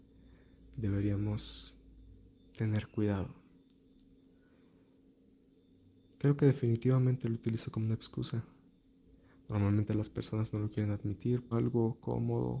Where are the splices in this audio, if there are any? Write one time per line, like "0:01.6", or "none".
0:11.5